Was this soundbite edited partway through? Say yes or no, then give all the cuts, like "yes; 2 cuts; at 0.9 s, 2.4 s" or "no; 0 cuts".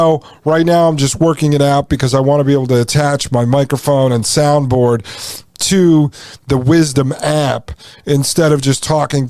no; 0 cuts